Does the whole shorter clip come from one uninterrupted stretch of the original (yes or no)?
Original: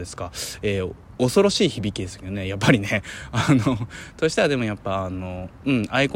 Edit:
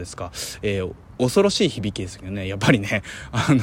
yes